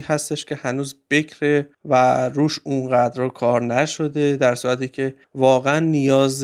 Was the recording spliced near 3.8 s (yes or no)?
no